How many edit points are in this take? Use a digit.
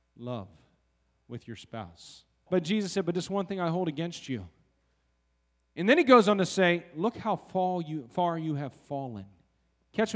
1